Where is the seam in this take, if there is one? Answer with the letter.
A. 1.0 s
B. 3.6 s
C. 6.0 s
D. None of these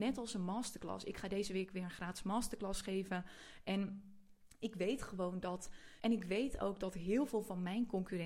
C